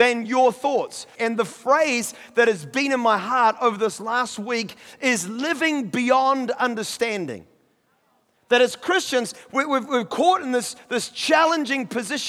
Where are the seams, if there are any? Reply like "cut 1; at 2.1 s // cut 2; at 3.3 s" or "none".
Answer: cut 1; at 1.1 s